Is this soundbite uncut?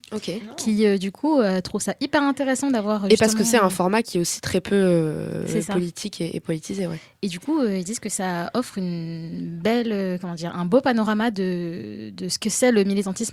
yes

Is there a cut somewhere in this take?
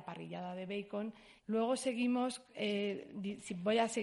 yes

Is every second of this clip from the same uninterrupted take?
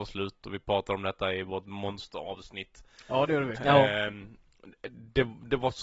no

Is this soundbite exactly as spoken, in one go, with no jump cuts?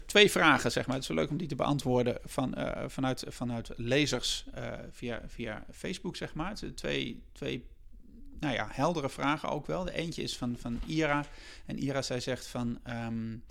yes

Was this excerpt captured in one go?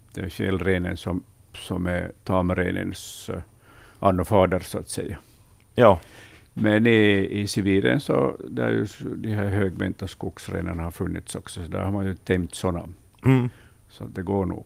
yes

